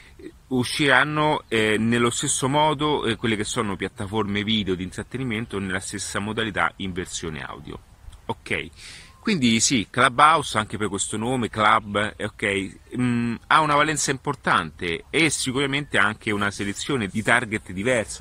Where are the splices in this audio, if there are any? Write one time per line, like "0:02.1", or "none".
0:17.1